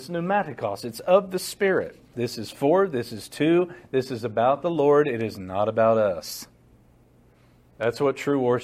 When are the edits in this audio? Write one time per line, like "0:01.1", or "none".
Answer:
0:02.1